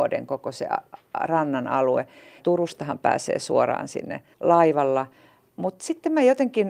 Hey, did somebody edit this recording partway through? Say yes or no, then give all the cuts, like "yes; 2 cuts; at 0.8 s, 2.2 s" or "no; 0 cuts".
yes; 1 cut; at 2.4 s